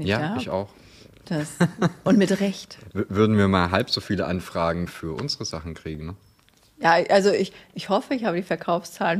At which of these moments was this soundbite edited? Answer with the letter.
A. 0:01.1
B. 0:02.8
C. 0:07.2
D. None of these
D